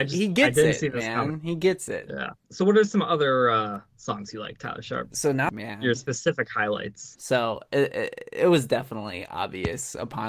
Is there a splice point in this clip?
yes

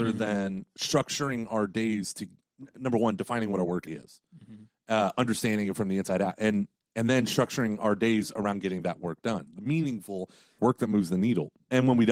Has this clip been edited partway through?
yes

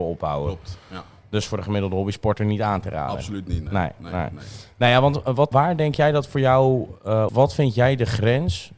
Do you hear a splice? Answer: yes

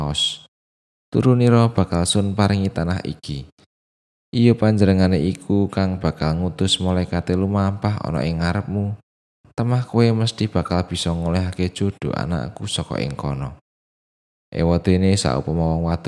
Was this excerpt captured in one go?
yes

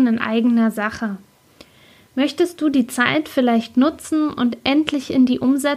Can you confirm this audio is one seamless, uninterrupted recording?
yes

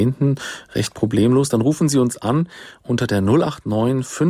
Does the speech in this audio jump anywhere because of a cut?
no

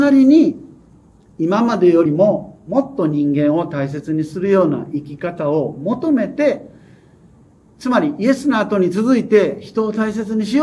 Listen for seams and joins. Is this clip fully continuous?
yes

